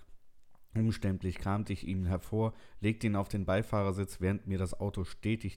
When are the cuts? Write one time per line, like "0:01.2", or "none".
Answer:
none